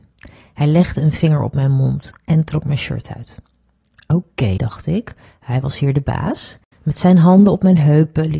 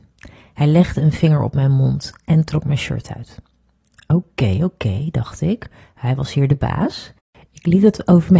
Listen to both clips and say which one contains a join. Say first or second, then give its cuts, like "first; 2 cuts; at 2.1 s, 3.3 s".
first; 2 cuts; at 4.6 s, 6.7 s